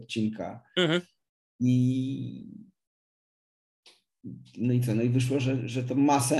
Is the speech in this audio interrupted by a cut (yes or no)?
no